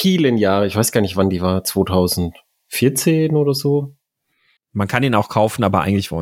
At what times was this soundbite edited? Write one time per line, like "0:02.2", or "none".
0:04.6